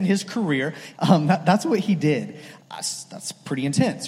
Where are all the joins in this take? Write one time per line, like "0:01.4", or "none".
0:00.9
0:02.6

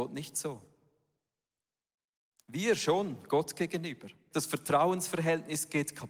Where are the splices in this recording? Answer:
0:04.3

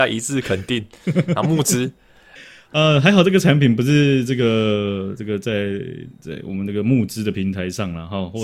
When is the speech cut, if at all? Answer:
0:02.4
0:06.1

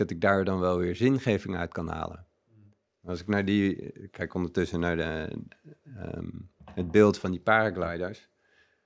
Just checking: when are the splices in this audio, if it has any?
none

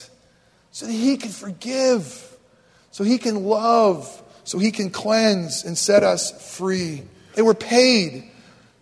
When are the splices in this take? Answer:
0:07.3

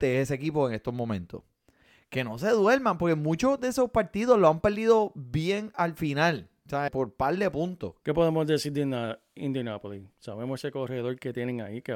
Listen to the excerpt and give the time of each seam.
0:06.9
0:08.0

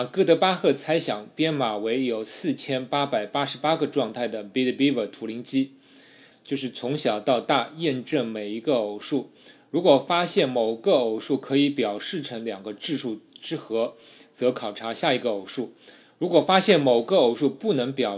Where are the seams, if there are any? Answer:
0:06.3

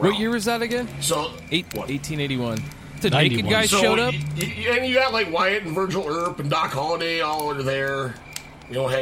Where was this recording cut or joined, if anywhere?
0:01.7
0:03.0
0:04.5

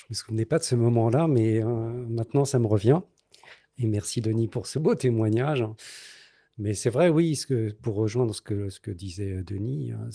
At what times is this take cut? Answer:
none

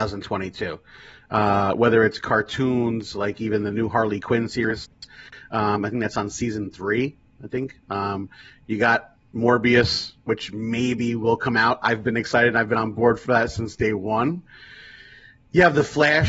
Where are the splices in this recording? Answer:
0:11.8

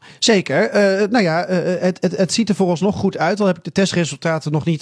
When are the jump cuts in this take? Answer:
none

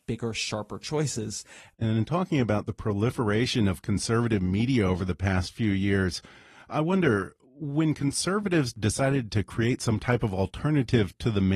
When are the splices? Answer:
0:01.7
0:07.4

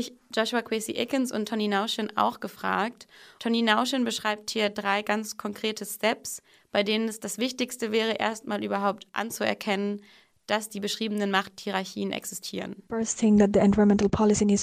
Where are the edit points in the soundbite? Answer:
0:03.4

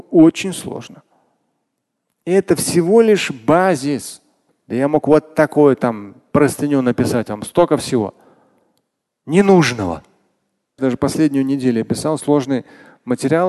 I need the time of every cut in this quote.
0:04.5
0:10.8

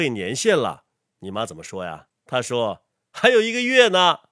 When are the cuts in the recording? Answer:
0:02.1

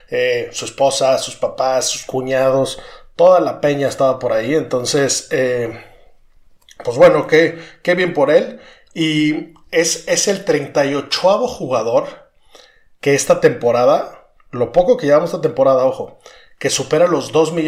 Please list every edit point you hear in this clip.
none

